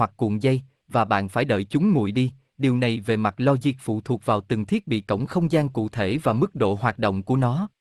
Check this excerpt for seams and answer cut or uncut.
uncut